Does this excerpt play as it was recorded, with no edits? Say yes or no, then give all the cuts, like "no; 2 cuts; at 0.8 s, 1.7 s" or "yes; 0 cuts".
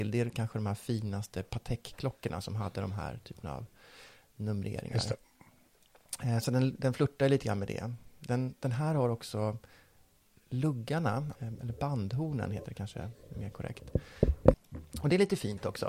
no; 2 cuts; at 11.3 s, 14.5 s